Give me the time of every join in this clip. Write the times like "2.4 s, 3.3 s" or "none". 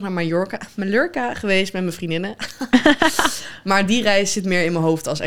none